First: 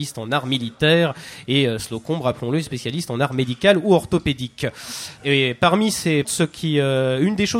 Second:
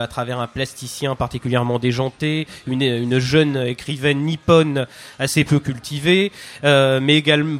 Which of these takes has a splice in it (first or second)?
first